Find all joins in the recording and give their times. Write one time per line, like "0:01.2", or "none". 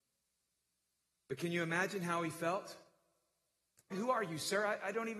0:03.9